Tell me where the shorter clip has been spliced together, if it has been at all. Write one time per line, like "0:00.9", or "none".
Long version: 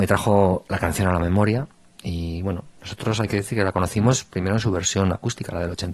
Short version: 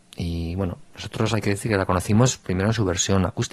none